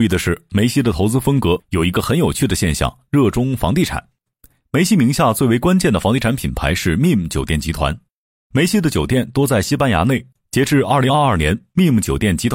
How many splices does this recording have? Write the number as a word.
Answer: zero